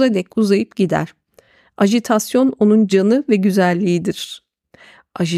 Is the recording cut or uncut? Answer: uncut